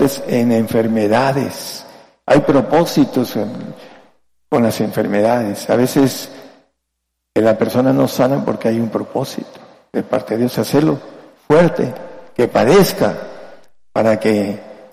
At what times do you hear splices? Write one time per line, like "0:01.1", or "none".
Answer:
none